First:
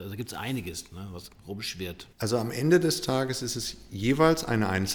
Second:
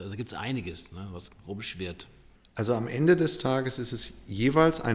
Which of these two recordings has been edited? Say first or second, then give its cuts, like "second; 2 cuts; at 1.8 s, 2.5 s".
first; 1 cut; at 2.1 s